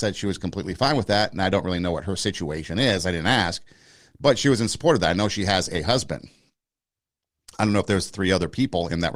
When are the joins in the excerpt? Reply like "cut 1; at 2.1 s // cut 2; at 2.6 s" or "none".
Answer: none